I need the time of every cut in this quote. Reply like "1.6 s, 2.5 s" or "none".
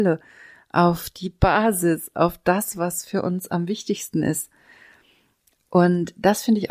none